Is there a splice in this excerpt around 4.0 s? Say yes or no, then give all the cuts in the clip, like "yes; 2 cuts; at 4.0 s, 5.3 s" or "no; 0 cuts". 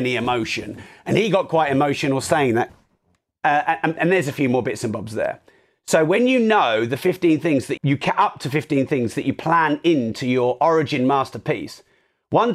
yes; 2 cuts; at 4.0 s, 7.8 s